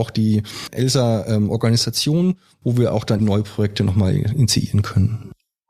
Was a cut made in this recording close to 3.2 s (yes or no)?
yes